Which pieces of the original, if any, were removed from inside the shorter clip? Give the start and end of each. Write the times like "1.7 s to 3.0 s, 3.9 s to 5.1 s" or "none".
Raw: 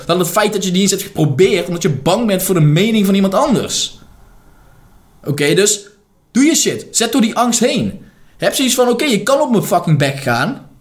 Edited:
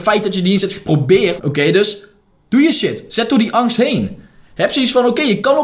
1.7 s to 5.2 s